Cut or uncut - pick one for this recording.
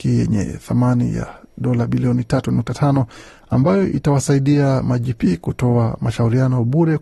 uncut